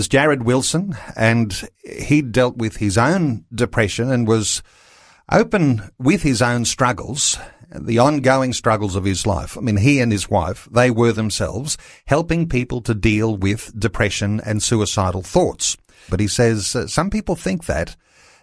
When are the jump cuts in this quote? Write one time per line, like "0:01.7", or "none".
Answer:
0:16.1